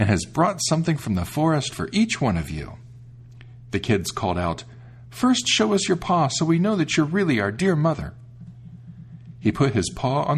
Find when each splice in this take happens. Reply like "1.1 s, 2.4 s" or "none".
none

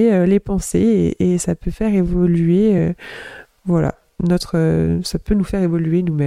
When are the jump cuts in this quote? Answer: none

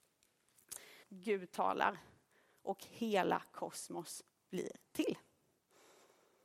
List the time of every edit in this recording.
1.0 s

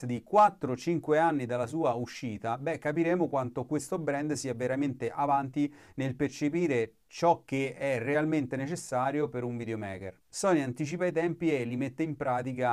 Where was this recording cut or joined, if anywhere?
none

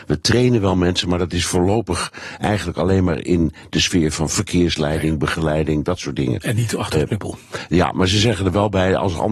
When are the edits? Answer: none

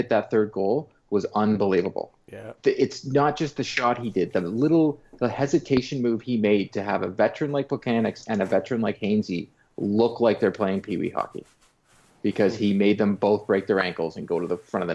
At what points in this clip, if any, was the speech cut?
2.6 s

